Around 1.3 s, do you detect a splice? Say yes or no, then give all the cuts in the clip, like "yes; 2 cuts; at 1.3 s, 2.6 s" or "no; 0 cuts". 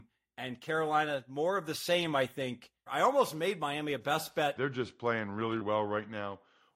no; 3 cuts; at 2.9 s, 4.6 s, 5.6 s